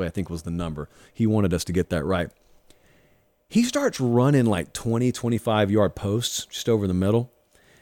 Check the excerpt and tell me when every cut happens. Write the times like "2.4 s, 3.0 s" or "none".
none